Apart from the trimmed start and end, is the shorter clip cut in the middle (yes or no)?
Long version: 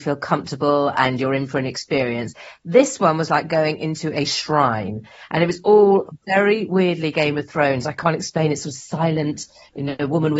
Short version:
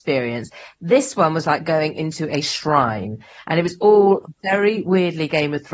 no